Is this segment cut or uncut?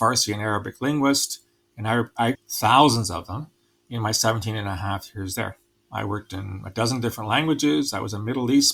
cut